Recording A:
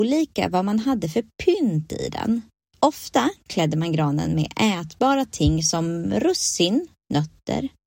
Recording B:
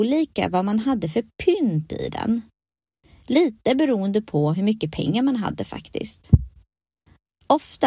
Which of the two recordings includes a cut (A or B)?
A